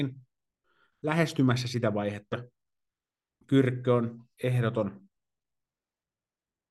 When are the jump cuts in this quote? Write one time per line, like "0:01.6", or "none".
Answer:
0:02.3
0:04.3